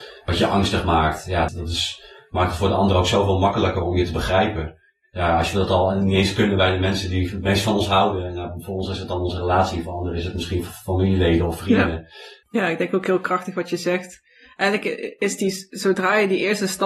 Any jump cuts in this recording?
yes; 2 cuts; at 1.5 s, 12.4 s

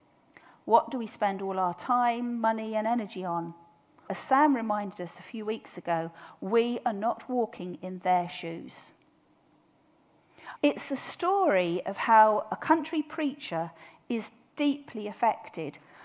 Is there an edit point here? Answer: yes; 2 cuts; at 4.1 s, 10.6 s

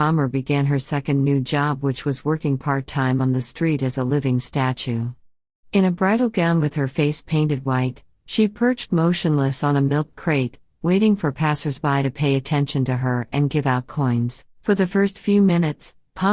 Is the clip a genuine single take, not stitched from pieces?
no; 2 cuts; at 8.3 s, 14.5 s

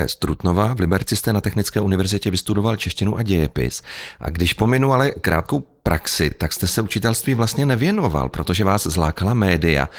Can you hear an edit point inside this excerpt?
no; 0 cuts

